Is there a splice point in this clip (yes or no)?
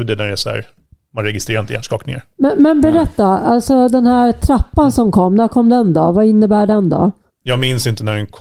yes